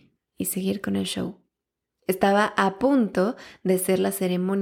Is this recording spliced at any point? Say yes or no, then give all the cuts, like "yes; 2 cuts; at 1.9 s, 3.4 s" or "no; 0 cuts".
no; 0 cuts